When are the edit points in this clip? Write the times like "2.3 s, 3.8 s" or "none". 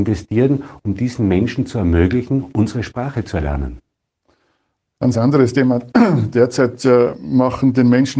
none

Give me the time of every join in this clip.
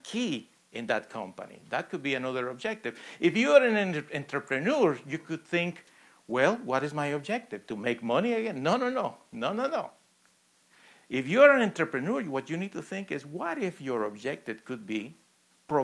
none

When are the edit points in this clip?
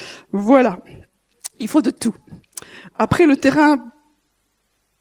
2.9 s

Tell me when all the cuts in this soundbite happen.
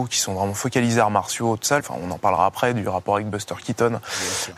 1.8 s

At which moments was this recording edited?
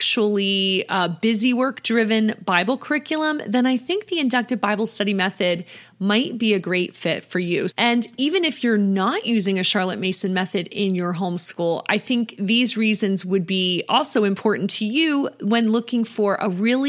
7.7 s

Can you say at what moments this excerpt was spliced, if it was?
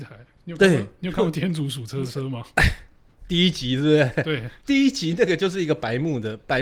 4.6 s

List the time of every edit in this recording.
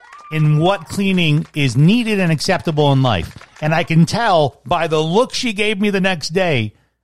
none

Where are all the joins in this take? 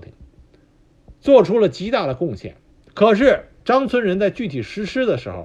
2.9 s

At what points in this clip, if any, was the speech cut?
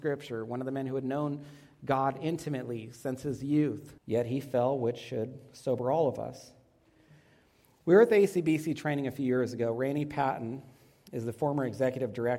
4.0 s

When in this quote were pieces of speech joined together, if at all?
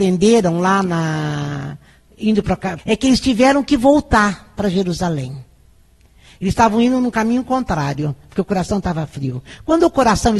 2.8 s

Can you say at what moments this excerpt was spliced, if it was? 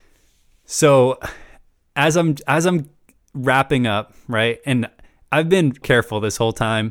5.8 s

